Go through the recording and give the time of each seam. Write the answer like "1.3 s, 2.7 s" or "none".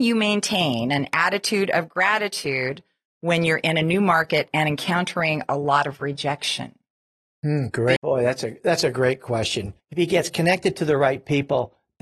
8.0 s, 9.8 s